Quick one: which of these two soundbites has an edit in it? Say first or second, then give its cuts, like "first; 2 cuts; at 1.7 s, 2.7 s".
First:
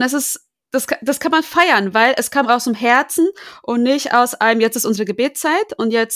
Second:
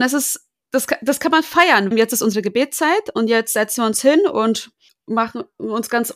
second; 1 cut; at 1.9 s